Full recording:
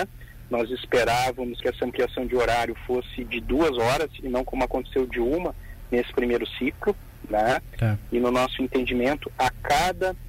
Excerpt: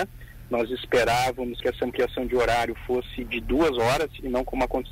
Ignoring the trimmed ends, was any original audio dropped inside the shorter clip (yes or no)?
no